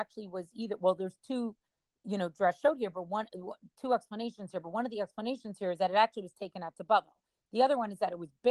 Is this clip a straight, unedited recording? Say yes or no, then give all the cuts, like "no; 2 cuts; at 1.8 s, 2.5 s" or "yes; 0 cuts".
yes; 0 cuts